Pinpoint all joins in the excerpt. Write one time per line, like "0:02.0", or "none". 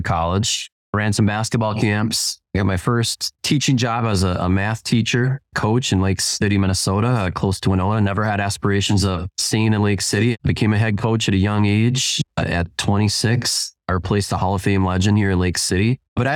0:10.4